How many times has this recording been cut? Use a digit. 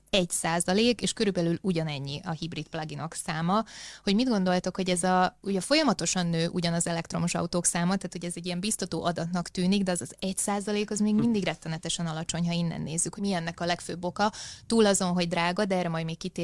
1